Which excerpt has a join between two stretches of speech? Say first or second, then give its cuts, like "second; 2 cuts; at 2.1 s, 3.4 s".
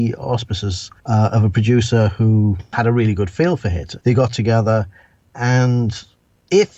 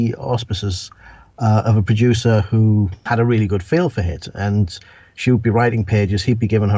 first; 2 cuts; at 1.0 s, 4.0 s